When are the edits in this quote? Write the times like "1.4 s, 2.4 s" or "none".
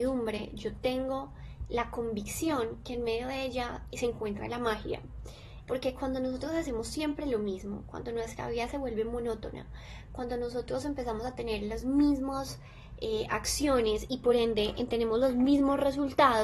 5.6 s